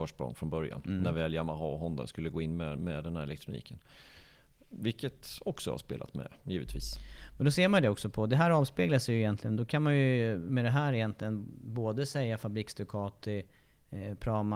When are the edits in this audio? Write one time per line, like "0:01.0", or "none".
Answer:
none